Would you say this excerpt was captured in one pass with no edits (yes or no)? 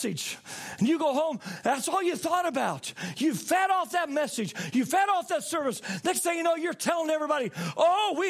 yes